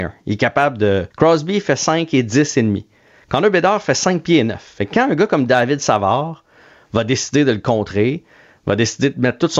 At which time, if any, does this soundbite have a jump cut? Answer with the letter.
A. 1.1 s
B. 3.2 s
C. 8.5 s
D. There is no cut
A